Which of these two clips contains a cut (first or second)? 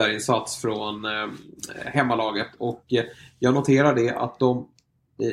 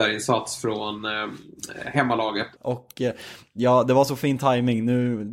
second